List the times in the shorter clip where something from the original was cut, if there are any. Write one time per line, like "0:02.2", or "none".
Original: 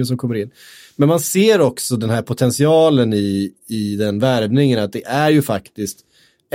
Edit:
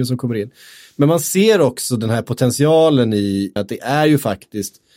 0:03.6